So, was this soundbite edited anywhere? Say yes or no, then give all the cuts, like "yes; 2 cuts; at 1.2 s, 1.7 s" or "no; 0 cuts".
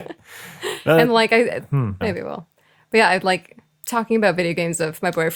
yes; 1 cut; at 2.0 s